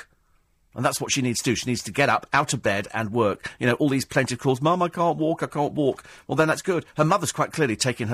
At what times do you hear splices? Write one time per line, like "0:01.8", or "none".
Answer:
none

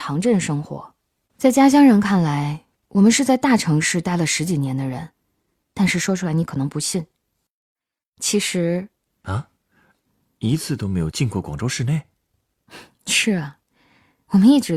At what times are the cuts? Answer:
0:01.3
0:09.1

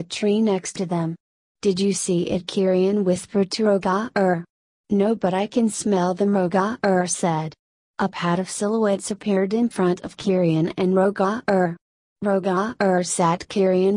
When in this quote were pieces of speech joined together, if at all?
none

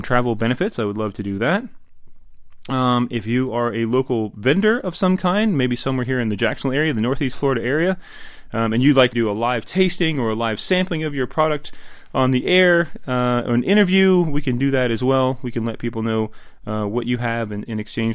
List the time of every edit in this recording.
0:09.1

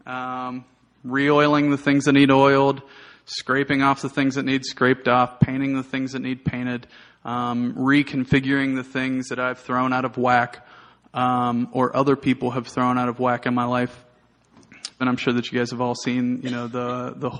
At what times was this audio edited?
0:15.0

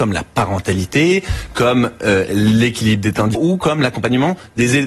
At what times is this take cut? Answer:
0:03.3

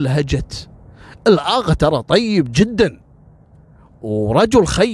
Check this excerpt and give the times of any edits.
none

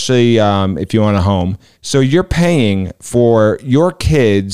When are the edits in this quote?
0:01.7

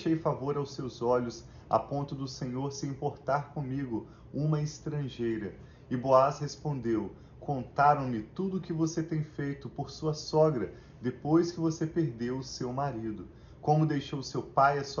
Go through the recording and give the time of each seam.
none

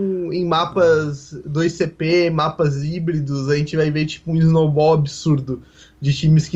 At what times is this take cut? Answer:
none

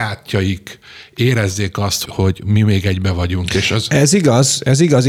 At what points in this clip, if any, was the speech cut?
0:02.0

